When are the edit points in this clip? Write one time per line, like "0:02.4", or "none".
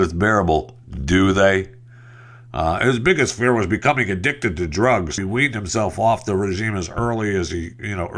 0:05.2